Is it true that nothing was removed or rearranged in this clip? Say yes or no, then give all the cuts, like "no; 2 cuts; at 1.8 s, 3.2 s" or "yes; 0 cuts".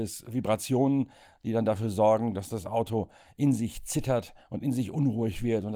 yes; 0 cuts